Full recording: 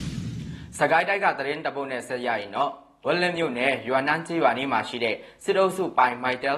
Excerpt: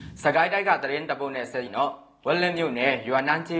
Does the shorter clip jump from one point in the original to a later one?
yes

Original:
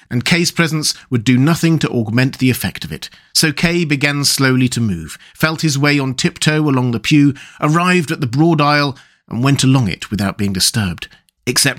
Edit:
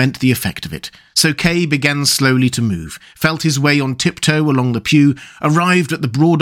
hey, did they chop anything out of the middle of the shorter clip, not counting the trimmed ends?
no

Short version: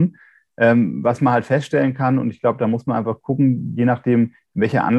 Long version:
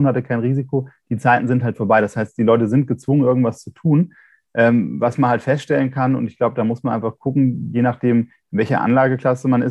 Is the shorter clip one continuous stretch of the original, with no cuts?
yes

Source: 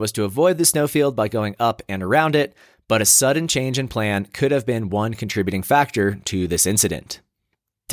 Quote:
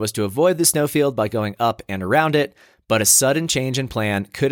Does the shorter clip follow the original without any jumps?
yes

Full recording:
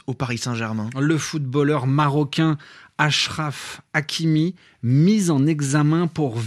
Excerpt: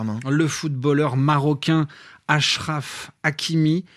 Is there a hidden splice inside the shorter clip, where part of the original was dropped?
no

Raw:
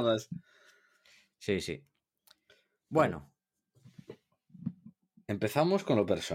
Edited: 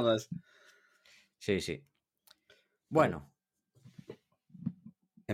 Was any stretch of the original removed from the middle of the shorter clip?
no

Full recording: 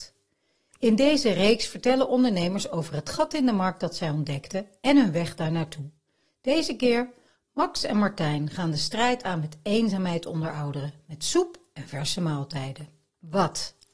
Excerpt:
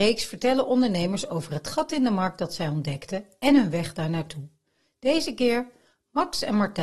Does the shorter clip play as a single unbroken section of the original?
yes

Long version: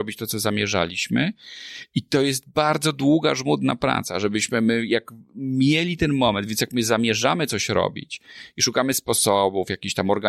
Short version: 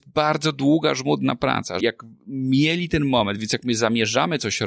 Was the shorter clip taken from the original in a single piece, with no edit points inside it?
no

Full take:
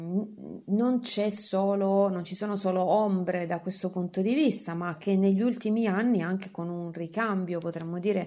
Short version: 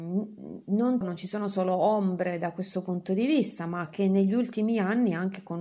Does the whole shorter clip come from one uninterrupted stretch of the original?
no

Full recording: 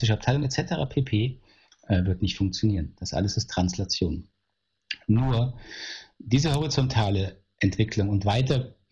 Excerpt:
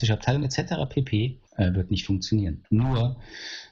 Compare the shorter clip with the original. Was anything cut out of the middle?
yes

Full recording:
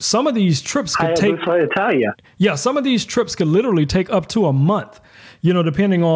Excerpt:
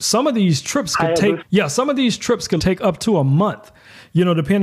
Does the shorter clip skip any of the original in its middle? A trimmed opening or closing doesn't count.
yes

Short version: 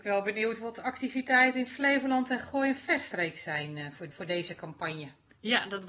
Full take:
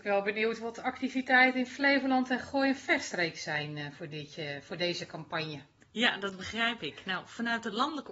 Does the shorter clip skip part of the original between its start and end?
yes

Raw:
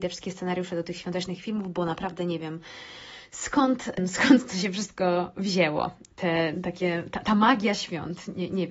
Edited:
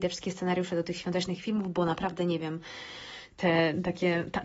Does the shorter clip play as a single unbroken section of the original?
no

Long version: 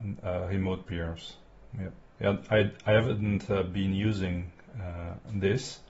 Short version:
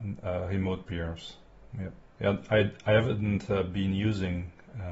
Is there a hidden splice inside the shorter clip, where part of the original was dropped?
no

